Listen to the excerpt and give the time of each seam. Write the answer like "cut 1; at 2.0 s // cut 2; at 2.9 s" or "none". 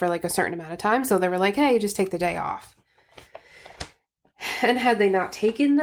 none